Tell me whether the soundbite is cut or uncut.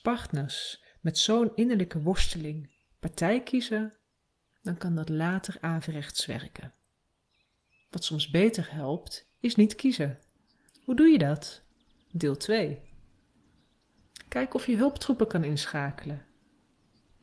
cut